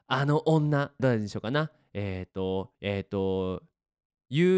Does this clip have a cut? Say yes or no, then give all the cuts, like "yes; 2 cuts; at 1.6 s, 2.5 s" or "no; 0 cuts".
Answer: yes; 2 cuts; at 1.0 s, 2.8 s